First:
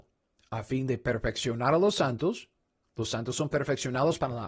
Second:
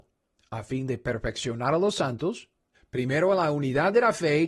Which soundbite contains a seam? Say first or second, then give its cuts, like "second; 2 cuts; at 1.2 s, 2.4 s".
second; 1 cut; at 2.7 s